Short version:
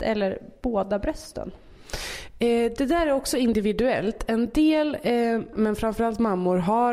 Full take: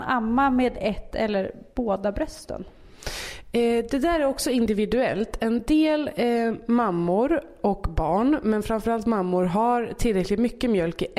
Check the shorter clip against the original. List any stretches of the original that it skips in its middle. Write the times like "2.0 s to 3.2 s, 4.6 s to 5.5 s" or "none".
6.7 s to 8.4 s